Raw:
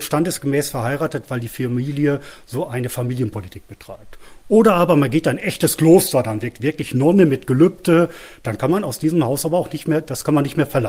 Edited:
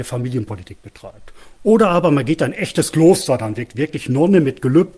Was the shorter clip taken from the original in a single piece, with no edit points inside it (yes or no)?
yes